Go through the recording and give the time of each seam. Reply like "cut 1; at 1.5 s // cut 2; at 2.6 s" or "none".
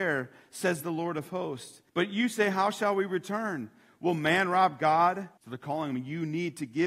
cut 1; at 1.9 s // cut 2; at 5.4 s